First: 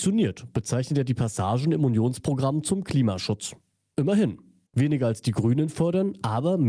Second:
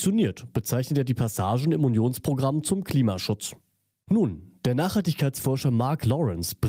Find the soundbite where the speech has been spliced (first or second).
second